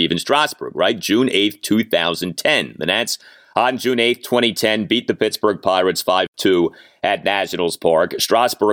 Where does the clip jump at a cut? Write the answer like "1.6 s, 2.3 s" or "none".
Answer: none